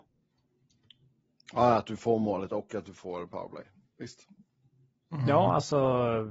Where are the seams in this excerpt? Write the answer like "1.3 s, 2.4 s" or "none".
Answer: none

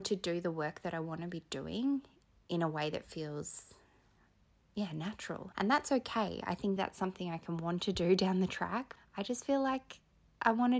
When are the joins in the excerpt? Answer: 5.5 s, 6.8 s, 9.0 s

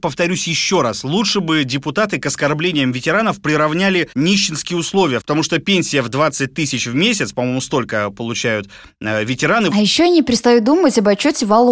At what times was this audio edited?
4.1 s, 5.2 s, 9.7 s

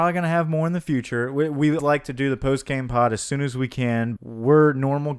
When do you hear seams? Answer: 1.8 s, 4.2 s

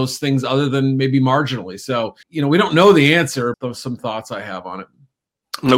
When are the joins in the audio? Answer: 2.2 s, 3.5 s

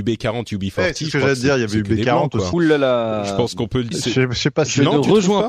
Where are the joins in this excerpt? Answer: 2.5 s, 3.9 s

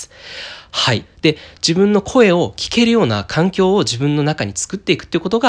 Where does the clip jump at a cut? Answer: 1.0 s

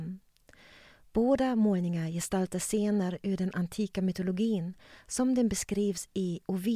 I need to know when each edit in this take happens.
none

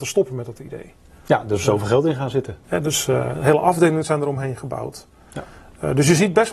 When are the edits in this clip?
2.6 s

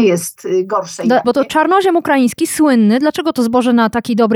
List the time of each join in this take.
1.2 s

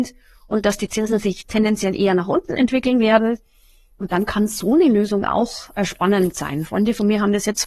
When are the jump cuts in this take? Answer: none

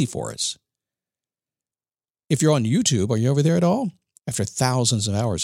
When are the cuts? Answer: 4.2 s

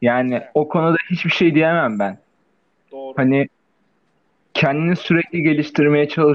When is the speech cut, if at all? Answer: none

